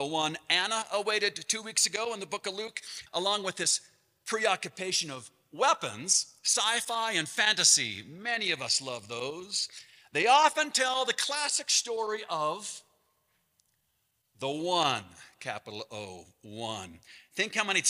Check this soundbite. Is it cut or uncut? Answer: cut